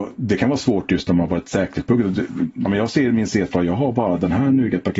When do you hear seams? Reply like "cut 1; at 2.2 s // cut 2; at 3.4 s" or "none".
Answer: cut 1; at 2.7 s